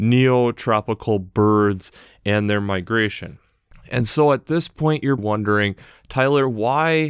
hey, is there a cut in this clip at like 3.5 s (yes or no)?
no